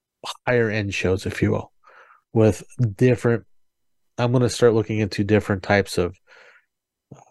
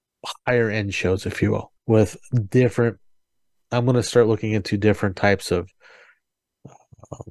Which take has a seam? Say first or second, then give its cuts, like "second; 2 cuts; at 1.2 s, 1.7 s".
second; 1 cut; at 1.8 s